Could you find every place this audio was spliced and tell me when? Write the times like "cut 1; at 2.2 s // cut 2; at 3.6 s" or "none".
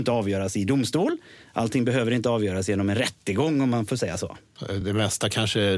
none